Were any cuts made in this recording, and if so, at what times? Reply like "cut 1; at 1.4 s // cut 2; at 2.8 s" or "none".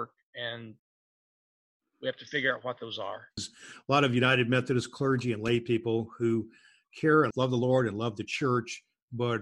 cut 1; at 3.4 s // cut 2; at 7.3 s